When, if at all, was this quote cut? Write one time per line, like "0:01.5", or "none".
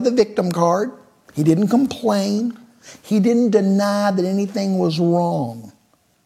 none